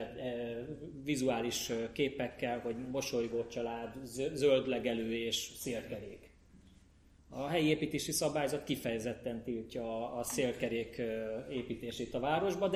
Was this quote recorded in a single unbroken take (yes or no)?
yes